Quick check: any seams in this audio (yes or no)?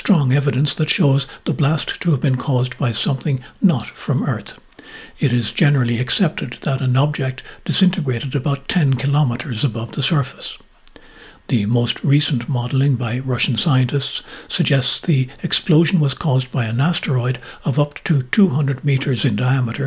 no